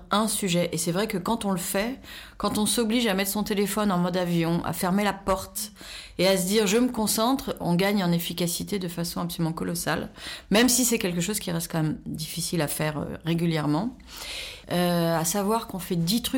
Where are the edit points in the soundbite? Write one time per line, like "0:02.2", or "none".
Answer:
0:07.6
0:14.6